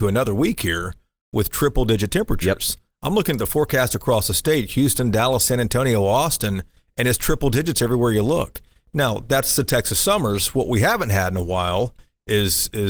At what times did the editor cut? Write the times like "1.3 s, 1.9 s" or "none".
none